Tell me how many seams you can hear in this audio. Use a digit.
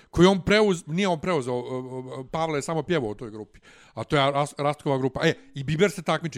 0